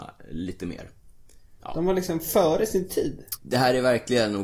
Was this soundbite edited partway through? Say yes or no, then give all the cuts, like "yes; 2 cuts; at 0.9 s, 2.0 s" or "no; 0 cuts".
yes; 2 cuts; at 1.6 s, 3.4 s